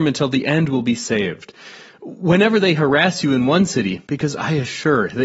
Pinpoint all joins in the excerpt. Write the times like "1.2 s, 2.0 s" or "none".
4.1 s